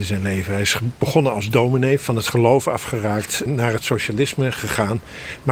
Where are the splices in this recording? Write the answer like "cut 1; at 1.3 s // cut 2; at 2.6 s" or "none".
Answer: cut 1; at 3.5 s